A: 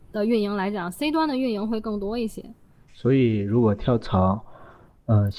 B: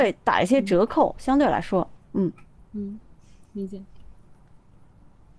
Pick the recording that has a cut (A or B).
A